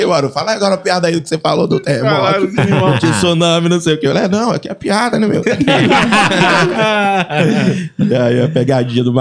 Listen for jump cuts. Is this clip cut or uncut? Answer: cut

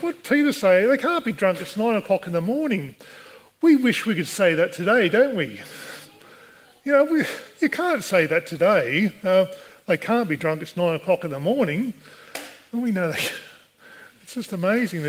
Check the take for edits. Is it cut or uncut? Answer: uncut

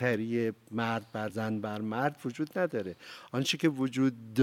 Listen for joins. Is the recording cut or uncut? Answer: cut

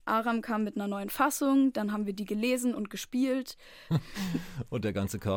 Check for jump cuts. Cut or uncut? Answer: cut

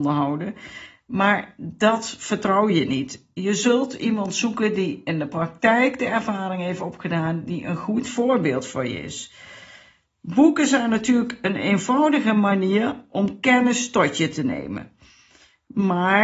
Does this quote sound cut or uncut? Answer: uncut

